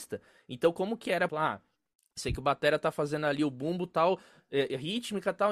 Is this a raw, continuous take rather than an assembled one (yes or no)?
no